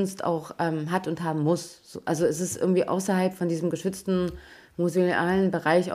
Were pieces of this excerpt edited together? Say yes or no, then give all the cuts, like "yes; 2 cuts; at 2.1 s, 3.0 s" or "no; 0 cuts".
no; 0 cuts